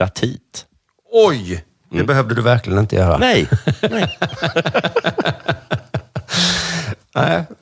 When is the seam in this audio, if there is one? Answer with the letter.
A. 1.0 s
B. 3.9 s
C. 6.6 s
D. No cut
D